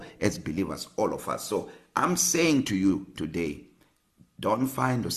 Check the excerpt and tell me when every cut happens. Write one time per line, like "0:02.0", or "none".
none